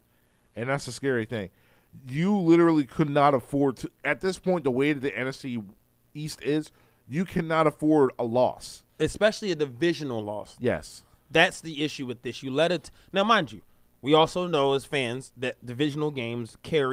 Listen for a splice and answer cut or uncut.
cut